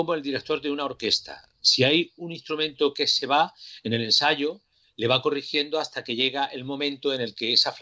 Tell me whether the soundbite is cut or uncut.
uncut